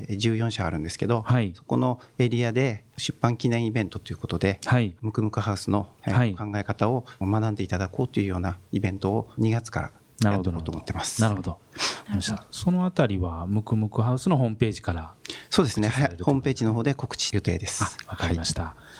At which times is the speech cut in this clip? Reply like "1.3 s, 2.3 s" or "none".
none